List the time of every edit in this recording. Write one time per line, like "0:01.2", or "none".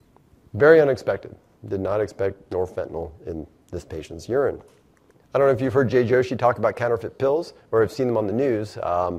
0:05.2

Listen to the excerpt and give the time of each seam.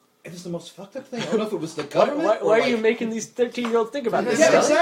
none

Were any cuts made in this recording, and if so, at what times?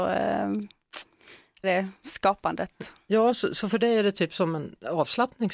0:01.6

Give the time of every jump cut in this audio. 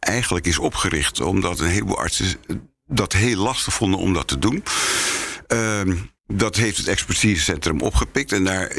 0:06.2

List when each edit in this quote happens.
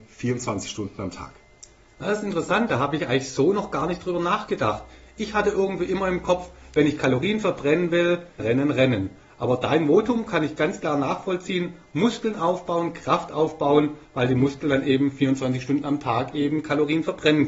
0:08.4

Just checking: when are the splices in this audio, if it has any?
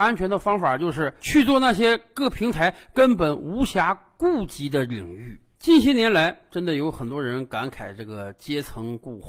0:05.6

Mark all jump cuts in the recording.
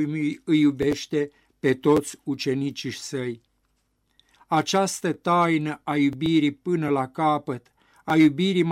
0:04.3

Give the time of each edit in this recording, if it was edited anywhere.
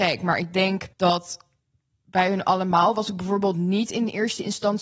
0:00.9

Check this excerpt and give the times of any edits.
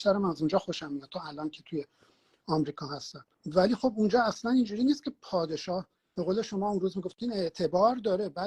0:03.3

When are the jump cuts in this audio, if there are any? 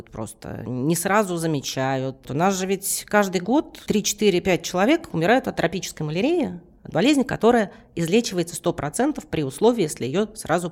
0:02.2

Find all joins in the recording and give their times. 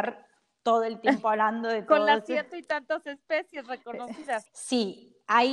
0:04.5

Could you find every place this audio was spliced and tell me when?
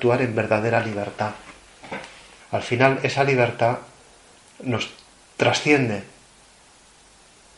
0:02.4

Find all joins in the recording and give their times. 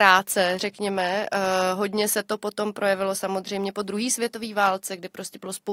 none

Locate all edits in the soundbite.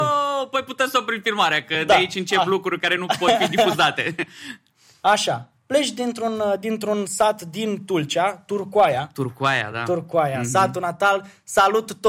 none

